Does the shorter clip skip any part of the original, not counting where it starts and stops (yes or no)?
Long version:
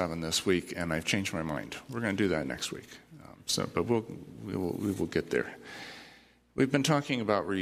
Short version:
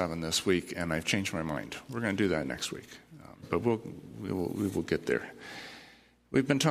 yes